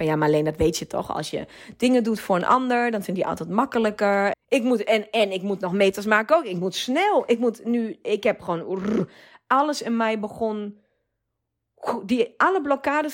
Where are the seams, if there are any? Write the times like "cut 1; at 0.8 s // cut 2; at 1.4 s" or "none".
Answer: cut 1; at 4.3 s